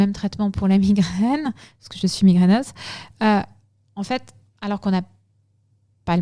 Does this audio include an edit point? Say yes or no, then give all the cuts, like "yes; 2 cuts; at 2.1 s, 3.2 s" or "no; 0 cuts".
no; 0 cuts